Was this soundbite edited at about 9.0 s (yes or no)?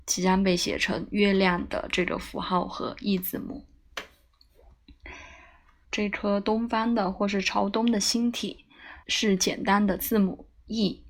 yes